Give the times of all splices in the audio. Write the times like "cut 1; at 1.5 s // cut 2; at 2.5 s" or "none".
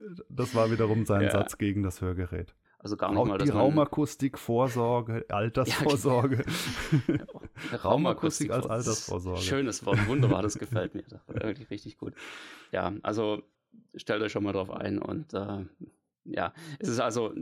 cut 1; at 2.6 s